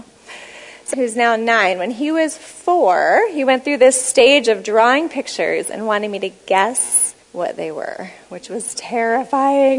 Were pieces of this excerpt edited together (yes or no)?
yes